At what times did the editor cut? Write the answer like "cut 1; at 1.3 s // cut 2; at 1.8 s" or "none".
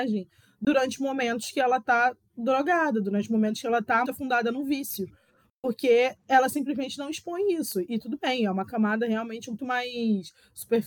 cut 1; at 4.0 s // cut 2; at 9.6 s